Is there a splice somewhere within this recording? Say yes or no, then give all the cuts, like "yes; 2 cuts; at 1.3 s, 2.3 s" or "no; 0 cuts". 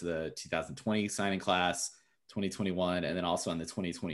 no; 0 cuts